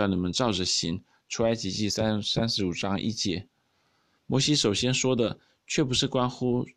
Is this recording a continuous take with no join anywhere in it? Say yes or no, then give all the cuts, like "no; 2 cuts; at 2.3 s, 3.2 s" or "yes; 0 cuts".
yes; 0 cuts